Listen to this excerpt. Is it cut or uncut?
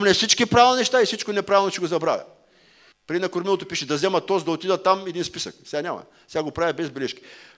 cut